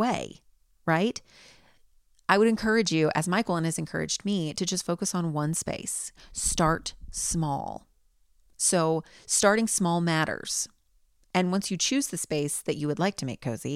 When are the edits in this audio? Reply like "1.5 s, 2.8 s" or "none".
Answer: none